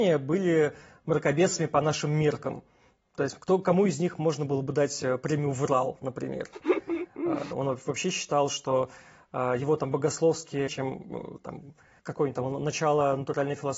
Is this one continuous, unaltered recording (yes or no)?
no